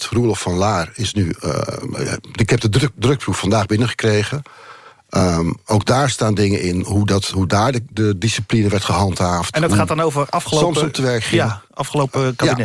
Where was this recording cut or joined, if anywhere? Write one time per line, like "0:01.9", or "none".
none